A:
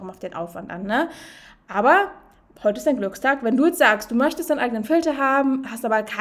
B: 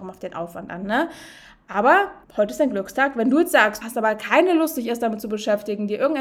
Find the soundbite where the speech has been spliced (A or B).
B